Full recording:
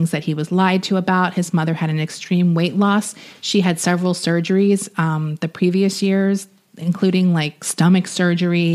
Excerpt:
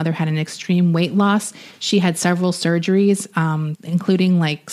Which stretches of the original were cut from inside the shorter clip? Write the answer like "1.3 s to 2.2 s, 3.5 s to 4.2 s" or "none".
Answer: 5.4 s to 6.7 s